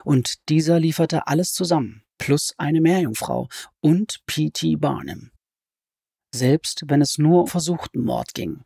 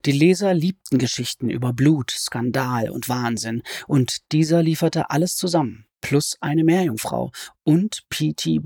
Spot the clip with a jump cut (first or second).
first